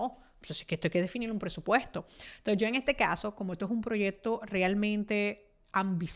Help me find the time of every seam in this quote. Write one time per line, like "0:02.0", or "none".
none